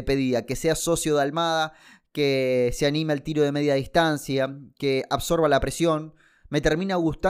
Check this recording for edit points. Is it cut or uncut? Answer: uncut